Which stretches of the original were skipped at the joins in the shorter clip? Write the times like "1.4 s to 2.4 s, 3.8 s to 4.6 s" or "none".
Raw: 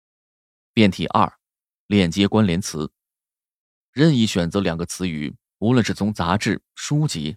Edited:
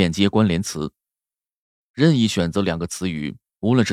none